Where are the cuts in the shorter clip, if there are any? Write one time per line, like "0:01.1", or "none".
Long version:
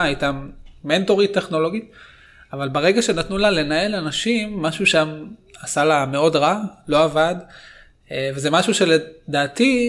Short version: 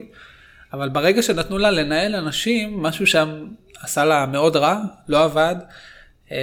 none

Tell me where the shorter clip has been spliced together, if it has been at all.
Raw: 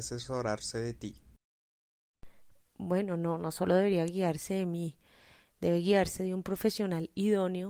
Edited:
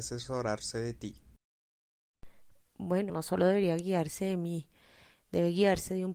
0:03.1

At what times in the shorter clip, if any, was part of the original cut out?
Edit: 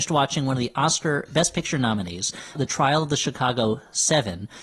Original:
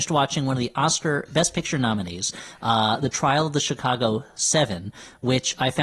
0:02.6

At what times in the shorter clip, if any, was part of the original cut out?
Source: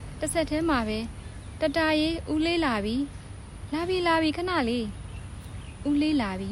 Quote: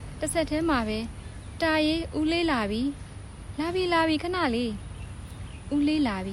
0:01.6

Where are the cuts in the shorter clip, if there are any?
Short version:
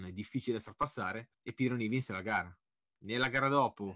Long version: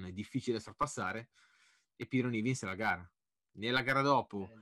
0:01.3

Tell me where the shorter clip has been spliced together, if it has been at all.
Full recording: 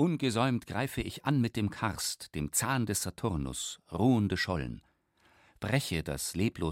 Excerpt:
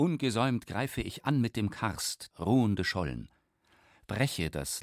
0:02.3

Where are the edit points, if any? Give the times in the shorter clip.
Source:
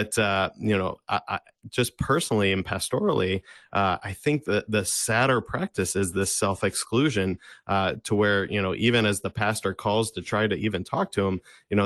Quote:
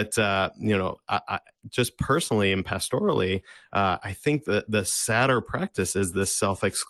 none

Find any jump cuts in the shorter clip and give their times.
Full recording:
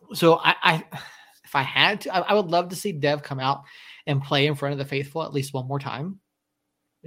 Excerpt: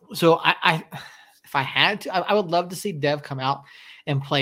none

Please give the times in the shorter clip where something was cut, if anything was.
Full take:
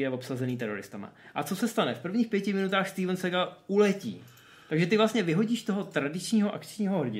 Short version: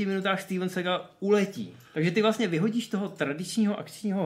0:01.9

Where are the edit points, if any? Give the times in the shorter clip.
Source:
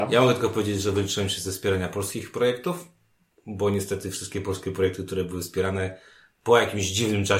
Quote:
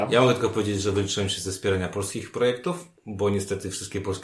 0:03.0

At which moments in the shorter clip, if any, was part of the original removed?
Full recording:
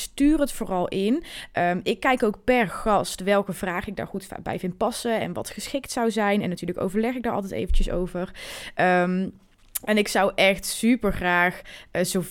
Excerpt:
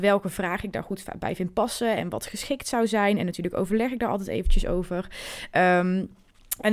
none

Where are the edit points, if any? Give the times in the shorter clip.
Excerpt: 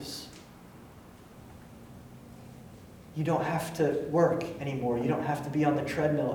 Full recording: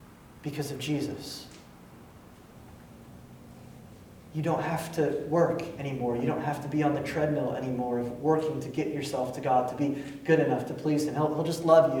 none

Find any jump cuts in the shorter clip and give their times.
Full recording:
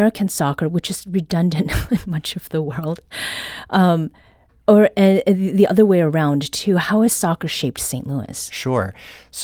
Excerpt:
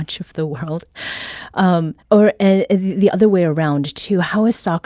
0:02.0

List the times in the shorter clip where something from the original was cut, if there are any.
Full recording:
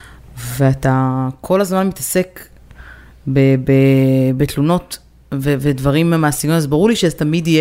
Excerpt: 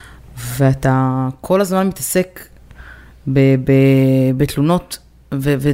none

